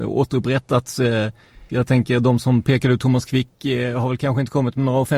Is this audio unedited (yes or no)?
no